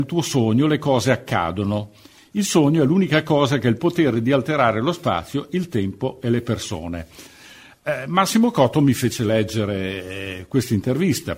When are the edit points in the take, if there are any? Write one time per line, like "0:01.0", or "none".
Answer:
none

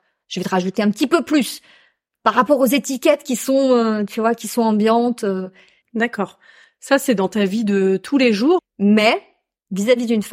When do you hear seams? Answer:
0:05.8
0:08.6

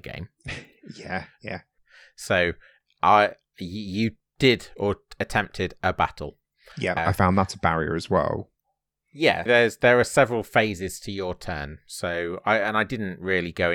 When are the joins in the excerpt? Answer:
0:01.8
0:07.0
0:09.5

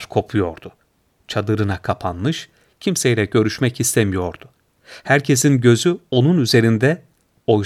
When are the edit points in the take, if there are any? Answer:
none

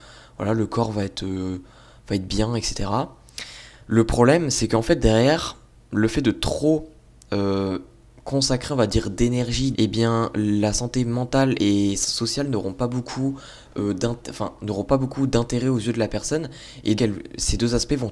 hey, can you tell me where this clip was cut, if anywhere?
0:09.7
0:17.0

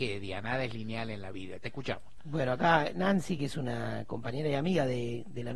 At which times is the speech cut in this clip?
none

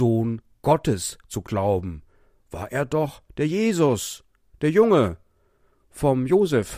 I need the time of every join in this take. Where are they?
none

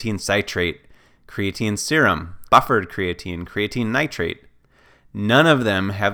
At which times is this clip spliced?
0:02.5

